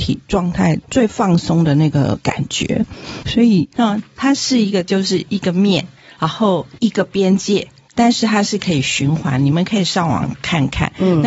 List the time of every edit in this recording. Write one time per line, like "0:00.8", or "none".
0:03.8